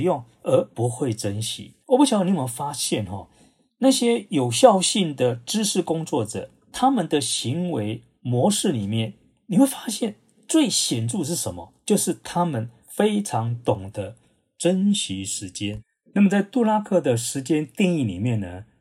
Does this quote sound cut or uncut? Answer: uncut